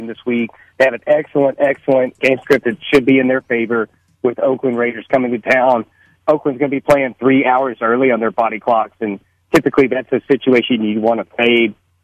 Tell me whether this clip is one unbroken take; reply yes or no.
no